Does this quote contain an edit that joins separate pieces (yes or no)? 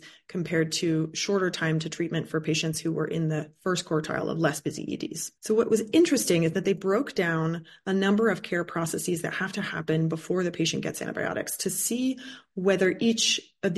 yes